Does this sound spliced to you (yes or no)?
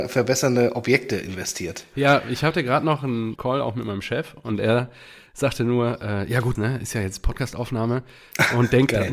yes